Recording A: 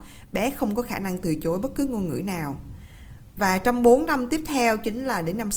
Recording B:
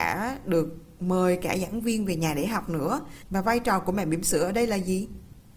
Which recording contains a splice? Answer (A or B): B